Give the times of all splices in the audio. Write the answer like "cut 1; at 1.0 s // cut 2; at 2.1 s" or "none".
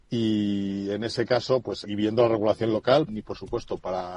cut 1; at 1.8 s // cut 2; at 3.1 s